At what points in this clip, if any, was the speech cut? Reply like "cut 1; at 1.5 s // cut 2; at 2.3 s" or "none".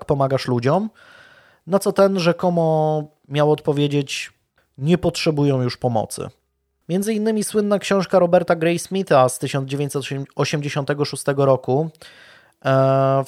cut 1; at 4.6 s // cut 2; at 6.8 s